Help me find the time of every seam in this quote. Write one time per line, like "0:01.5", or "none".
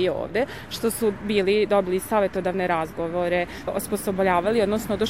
0:03.7